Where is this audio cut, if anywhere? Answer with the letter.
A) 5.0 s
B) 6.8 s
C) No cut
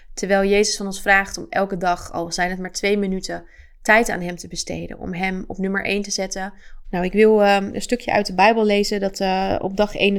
B